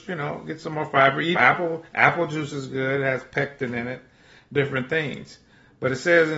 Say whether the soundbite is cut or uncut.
cut